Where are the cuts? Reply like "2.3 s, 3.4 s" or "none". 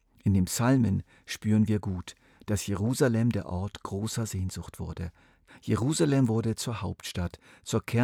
5.5 s